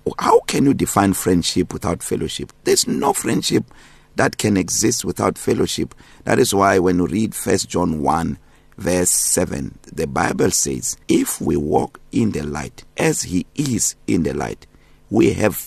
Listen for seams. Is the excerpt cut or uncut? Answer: cut